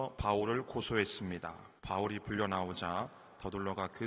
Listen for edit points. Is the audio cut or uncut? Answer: cut